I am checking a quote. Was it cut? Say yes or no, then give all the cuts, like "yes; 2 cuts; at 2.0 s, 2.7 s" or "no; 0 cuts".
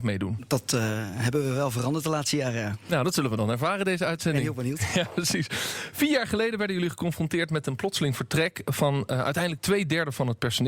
no; 0 cuts